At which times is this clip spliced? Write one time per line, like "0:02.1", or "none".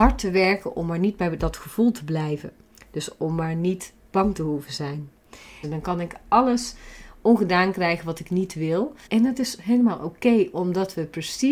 0:05.6
0:09.1